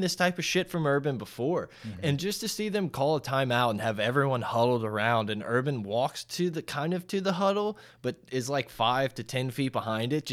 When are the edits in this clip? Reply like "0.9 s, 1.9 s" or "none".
none